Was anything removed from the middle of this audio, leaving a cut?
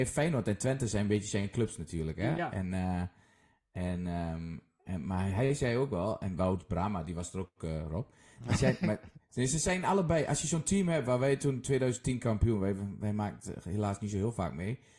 no; 0 cuts

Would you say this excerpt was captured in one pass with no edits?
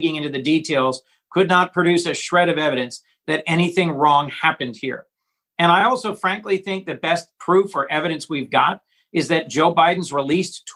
yes; 0 cuts

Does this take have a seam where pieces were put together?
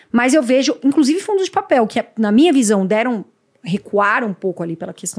no; 0 cuts

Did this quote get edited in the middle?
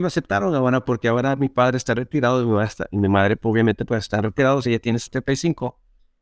yes; 1 cut; at 4.6 s

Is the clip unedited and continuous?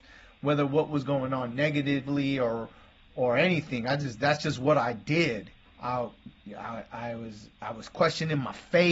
no; 1 cut; at 5.6 s

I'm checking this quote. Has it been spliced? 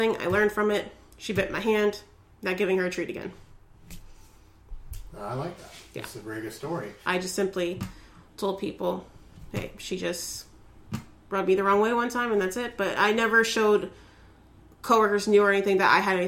yes; 1 cut; at 7.0 s

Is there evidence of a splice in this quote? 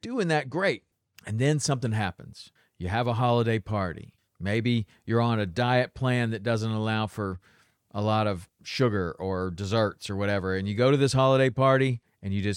no; 0 cuts

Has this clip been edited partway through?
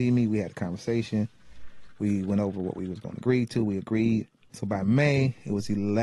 yes; 1 cut; at 4.5 s

